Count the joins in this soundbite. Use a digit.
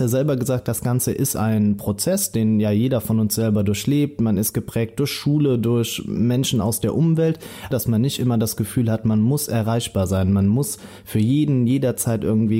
1